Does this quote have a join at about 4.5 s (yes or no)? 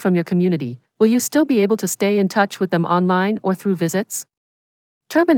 no